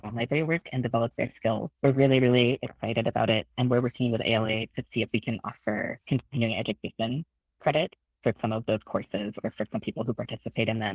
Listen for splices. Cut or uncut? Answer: cut